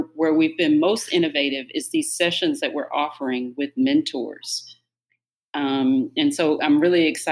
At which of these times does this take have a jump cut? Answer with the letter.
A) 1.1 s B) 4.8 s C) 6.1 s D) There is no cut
D